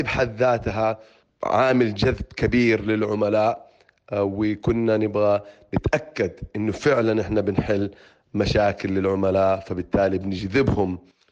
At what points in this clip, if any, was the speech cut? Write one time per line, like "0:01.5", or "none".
none